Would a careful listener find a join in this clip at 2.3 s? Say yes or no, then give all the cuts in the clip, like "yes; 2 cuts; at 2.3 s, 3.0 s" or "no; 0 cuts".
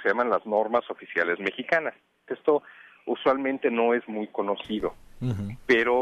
yes; 1 cut; at 2.3 s